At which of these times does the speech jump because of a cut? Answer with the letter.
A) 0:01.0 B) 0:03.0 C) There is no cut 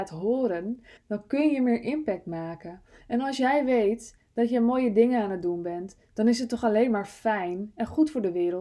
A